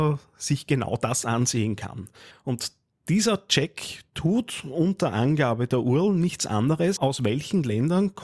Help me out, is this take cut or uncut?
cut